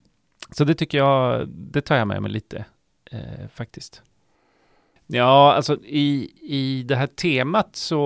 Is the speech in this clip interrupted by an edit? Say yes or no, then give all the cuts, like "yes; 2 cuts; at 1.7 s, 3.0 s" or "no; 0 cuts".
yes; 1 cut; at 5.0 s